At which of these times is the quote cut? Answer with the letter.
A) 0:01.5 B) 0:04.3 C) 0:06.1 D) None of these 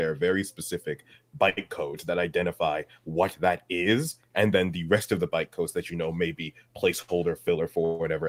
D